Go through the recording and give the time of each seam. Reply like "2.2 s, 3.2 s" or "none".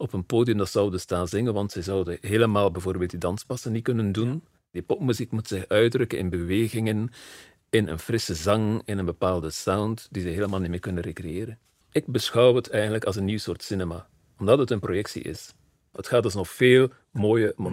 4.6 s, 11.8 s, 15.9 s